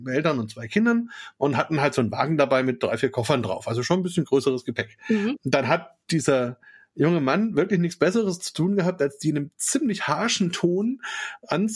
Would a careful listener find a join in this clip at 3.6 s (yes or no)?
no